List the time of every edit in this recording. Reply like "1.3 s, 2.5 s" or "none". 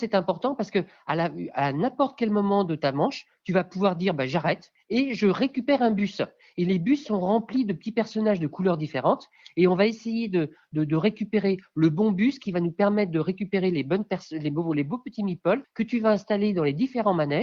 none